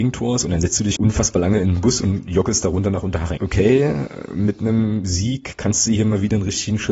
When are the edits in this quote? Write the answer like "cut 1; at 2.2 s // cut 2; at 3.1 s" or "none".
cut 1; at 1.0 s // cut 2; at 3.4 s